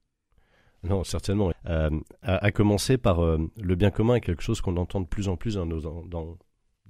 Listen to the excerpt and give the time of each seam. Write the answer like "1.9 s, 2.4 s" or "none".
1.5 s